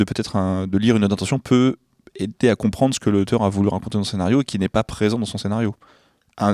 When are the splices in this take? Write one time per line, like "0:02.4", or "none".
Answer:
none